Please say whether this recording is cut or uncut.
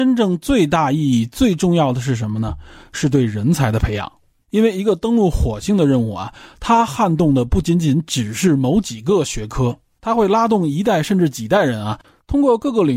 uncut